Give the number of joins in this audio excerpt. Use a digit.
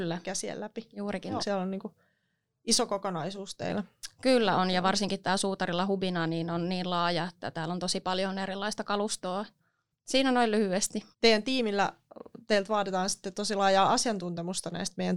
3